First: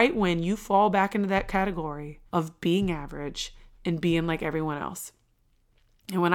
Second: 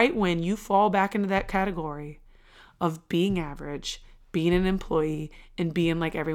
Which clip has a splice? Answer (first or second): first